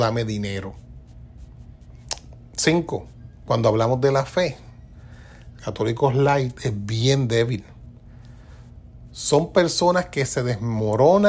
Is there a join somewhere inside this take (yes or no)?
yes